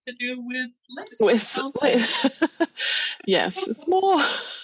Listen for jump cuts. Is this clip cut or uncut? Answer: uncut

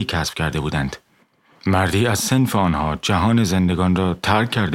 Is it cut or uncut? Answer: uncut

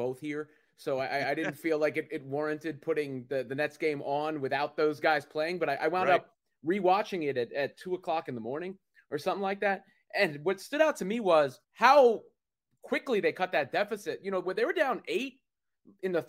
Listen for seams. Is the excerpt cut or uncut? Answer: cut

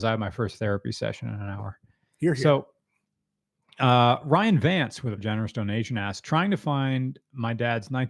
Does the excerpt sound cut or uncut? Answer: cut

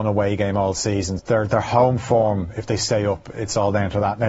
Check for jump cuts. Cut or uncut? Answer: cut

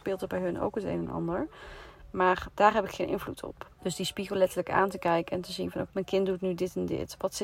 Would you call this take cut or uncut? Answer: cut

